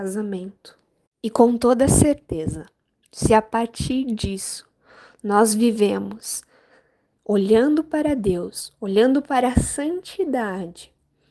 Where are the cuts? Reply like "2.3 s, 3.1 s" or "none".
1.1 s